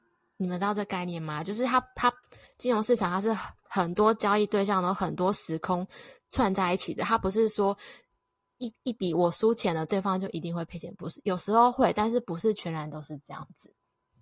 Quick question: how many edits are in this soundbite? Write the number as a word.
one